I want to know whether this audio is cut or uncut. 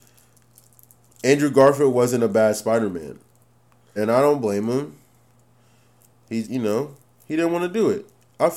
cut